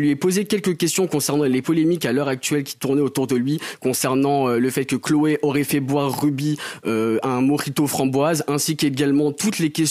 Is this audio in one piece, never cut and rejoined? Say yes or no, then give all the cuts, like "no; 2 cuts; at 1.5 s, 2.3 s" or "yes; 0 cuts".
yes; 0 cuts